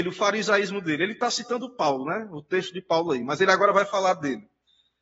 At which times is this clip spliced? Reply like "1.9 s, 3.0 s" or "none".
none